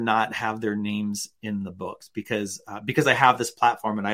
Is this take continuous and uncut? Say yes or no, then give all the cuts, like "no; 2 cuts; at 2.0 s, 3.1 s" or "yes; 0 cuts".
yes; 0 cuts